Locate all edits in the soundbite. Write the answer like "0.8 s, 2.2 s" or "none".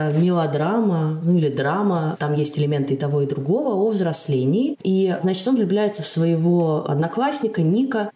4.8 s